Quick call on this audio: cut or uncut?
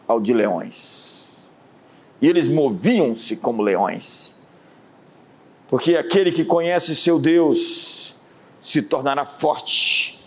uncut